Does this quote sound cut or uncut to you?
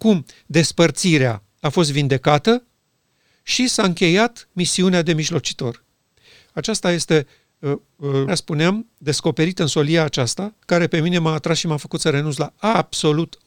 cut